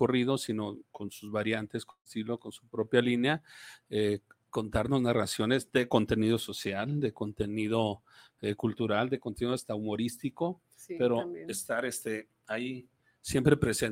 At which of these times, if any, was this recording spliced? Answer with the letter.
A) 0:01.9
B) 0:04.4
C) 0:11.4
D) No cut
D